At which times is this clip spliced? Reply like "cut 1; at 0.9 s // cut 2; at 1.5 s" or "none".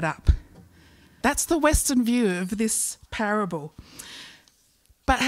cut 1; at 1.2 s